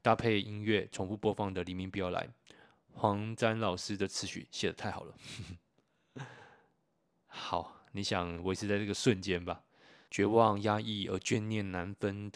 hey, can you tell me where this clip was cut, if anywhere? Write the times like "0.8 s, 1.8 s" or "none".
10.1 s